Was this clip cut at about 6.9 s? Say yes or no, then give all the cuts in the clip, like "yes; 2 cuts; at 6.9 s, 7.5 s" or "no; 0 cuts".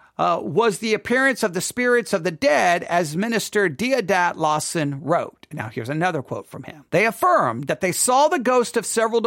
yes; 1 cut; at 6.9 s